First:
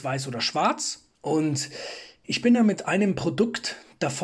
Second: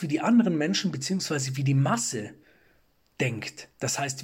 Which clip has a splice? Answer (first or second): first